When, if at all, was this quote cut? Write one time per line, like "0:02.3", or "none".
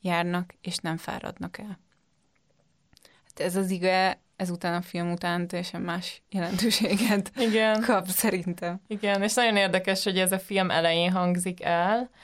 none